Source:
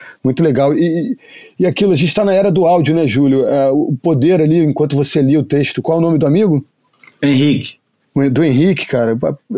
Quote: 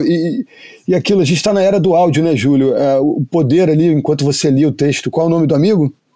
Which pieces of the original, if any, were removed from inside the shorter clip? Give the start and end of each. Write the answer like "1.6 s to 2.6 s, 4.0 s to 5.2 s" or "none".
none